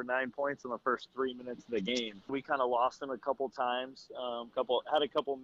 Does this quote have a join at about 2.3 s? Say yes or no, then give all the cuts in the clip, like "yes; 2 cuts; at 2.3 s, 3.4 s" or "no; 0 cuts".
yes; 1 cut; at 2.3 s